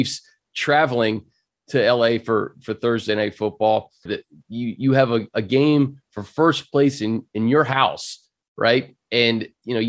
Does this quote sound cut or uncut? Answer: cut